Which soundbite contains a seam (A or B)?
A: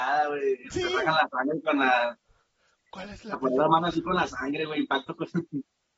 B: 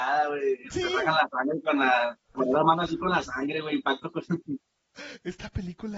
B